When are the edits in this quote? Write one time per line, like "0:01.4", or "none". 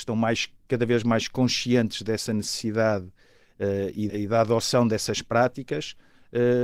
0:04.1